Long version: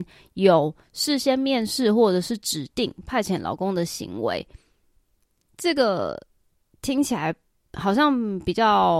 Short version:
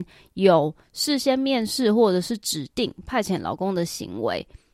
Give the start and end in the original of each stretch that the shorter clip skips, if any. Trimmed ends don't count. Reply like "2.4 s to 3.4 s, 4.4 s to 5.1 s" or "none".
none